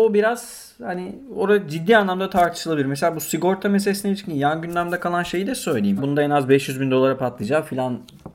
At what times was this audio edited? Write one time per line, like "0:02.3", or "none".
0:06.0